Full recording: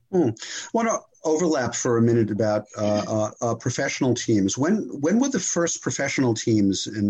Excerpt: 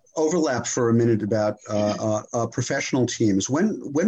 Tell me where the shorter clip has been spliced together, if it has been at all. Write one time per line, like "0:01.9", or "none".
none

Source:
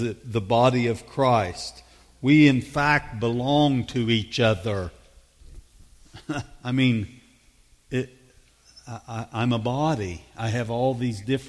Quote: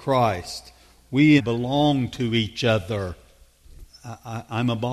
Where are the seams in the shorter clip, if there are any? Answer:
0:01.4
0:03.9

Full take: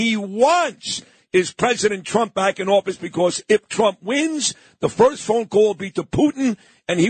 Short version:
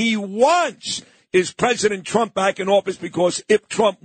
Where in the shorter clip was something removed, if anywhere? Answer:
none

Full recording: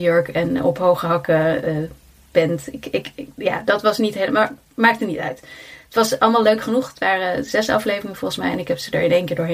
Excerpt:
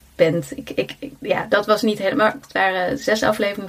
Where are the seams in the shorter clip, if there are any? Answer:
0:02.4

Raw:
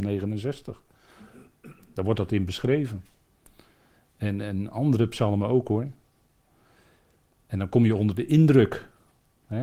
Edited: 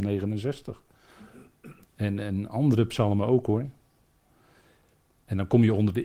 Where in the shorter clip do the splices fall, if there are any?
0:01.8

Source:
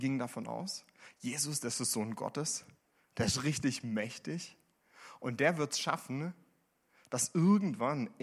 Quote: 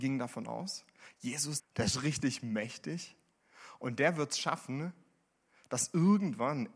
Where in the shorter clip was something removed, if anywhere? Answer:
0:01.6

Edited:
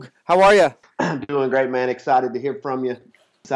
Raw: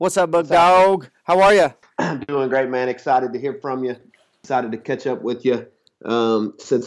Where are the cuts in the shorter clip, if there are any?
none

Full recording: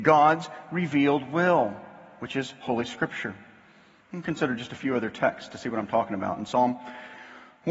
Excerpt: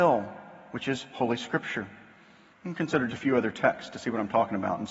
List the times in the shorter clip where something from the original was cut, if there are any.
0:03.1

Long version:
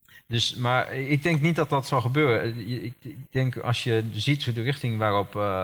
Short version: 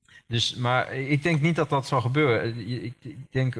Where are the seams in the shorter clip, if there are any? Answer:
none

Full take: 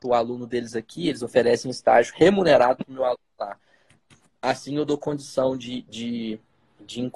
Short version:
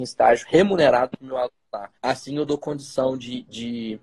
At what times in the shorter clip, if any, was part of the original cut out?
0:02.0

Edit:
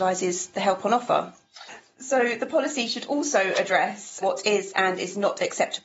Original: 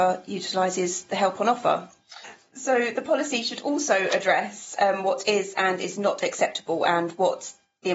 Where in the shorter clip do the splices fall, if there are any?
0:04.2

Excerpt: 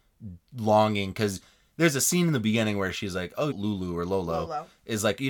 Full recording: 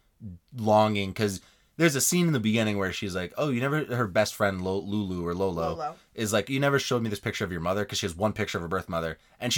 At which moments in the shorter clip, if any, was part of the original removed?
0:03.5

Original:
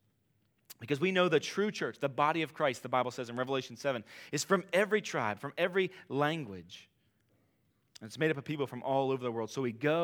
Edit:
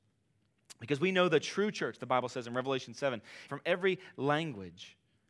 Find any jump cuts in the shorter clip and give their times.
0:02.0
0:03.5

